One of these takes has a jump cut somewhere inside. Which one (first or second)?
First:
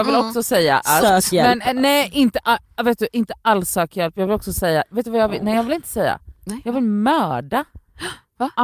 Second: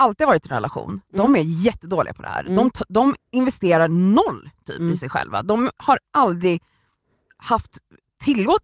first